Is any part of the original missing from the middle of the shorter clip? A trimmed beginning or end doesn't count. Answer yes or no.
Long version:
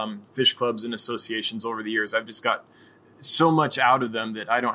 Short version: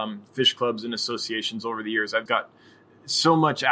yes